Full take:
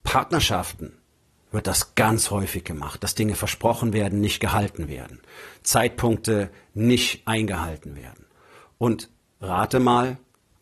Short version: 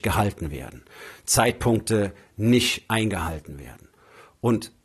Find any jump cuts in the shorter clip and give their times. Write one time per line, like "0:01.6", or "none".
none